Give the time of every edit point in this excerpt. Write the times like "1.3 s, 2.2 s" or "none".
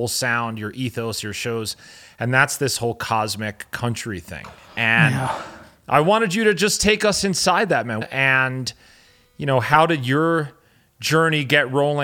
8.0 s